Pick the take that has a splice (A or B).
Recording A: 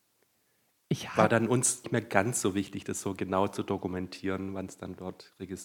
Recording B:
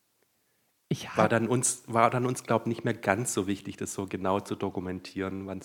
A